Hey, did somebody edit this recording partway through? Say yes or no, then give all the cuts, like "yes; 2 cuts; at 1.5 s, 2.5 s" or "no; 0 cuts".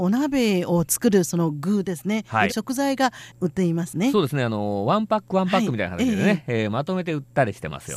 yes; 1 cut; at 2.5 s